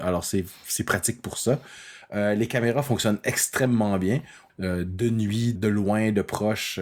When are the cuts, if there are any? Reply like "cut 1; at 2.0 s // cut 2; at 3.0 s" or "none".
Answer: cut 1; at 4.5 s // cut 2; at 5.6 s